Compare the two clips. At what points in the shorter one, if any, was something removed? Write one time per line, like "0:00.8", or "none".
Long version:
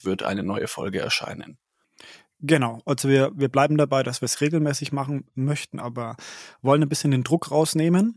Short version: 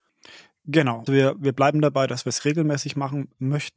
0:01.1